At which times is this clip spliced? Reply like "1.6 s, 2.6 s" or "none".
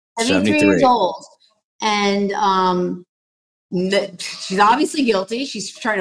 none